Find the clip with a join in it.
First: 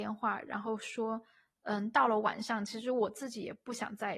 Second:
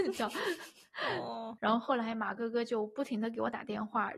second; 1 cut; at 1.6 s

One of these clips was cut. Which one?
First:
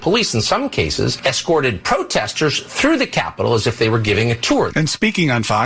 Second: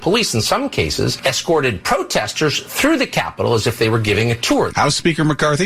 first; 1 cut; at 4.7 s

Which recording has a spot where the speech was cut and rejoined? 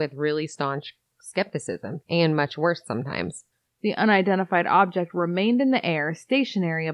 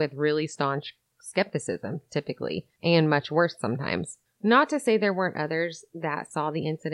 first; 2 cuts; at 2.0 s, 3.6 s

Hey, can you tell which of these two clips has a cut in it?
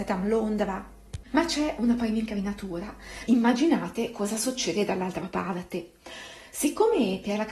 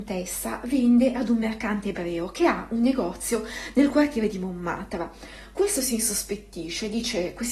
first; 1 cut; at 3.3 s

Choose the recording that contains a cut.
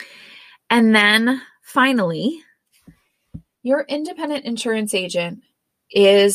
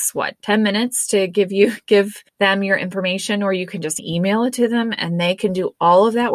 second; 2 cuts; at 2.3 s, 4.0 s

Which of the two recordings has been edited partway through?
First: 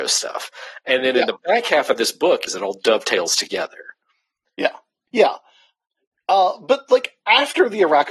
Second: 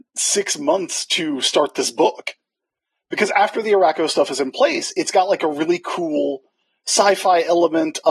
first; 2 cuts; at 2.5 s, 5.1 s

